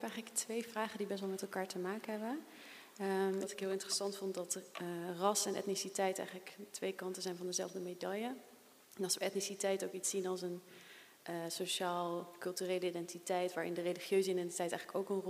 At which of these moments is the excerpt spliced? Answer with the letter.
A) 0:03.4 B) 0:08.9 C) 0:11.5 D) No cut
A